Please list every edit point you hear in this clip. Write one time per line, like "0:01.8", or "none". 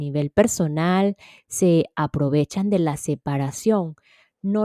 none